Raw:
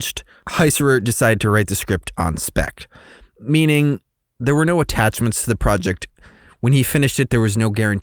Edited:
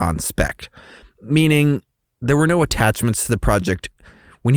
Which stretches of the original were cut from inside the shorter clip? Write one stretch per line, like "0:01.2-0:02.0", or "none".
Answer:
none